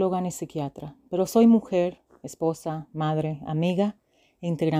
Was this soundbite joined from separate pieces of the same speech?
no; 0 cuts

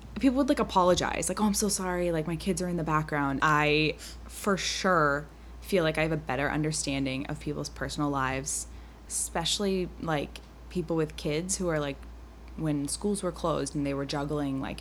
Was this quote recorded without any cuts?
no; 3 cuts; at 3.4 s, 9.1 s, 13.7 s

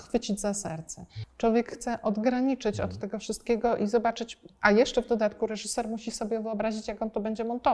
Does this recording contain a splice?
yes; 1 cut; at 1.2 s

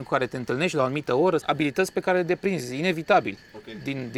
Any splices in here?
yes; 1 cut; at 1.4 s

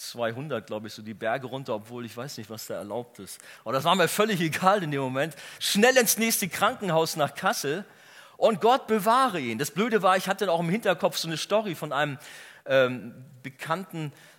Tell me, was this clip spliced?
no; 0 cuts

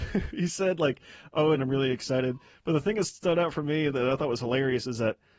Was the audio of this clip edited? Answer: yes; 1 cut; at 1.5 s

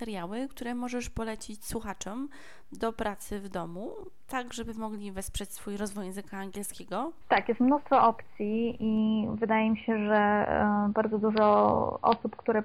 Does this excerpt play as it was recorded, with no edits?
no; 1 cut; at 7.2 s

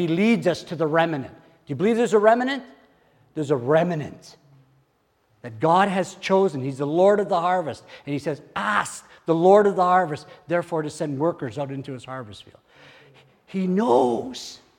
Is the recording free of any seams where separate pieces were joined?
yes; 0 cuts

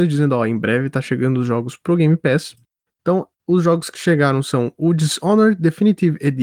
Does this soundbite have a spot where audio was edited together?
yes; 1 cut; at 2.9 s

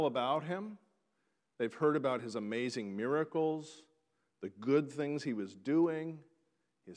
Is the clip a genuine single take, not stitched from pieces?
yes; 0 cuts

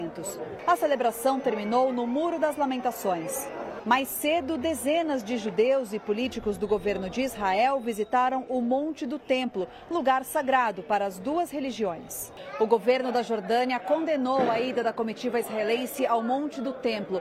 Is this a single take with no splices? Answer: yes; 0 cuts

